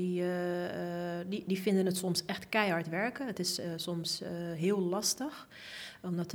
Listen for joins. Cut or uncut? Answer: uncut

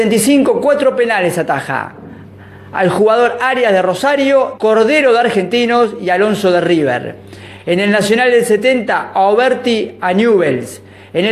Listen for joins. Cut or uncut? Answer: cut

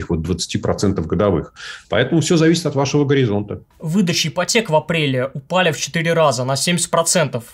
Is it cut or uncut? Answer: cut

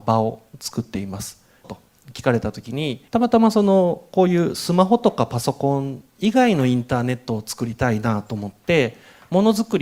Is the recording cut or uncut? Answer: cut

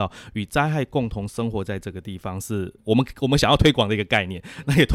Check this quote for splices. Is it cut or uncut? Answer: cut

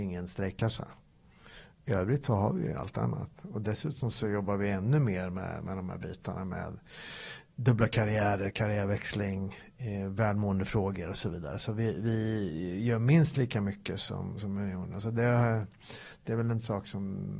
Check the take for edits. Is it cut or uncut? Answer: uncut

